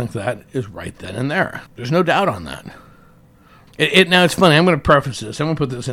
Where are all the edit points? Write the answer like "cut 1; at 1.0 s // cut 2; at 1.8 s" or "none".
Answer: cut 1; at 1.7 s // cut 2; at 3.7 s